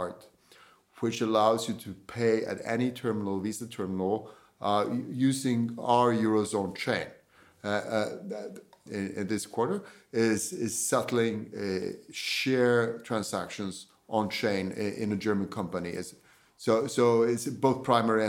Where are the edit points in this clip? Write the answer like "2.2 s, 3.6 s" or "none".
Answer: 8.9 s